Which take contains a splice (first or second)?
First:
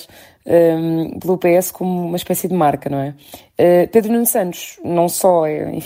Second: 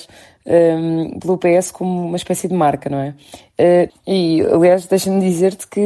second